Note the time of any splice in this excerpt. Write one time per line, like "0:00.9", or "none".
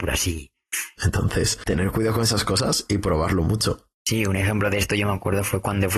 0:01.0
0:03.9